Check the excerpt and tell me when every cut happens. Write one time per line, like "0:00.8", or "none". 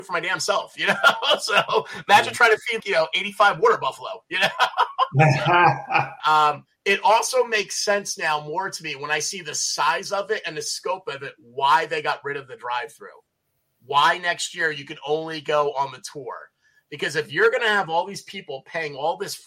0:02.8
0:06.2